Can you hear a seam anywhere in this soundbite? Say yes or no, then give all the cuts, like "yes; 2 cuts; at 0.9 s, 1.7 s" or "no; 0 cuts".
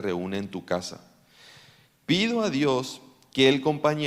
yes; 1 cut; at 1.9 s